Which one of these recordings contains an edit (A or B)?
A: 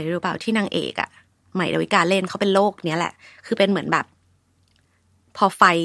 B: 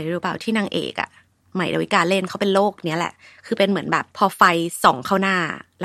B